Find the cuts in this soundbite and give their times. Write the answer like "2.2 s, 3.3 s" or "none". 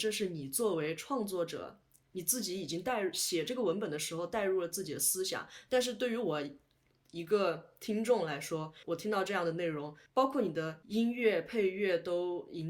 5.7 s